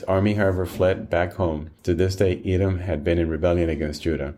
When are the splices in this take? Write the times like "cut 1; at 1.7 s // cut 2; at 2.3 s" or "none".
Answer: cut 1; at 1.8 s